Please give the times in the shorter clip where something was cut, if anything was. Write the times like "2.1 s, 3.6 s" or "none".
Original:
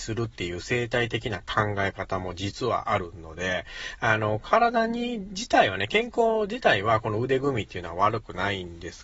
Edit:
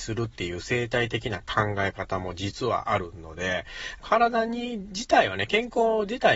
4.0 s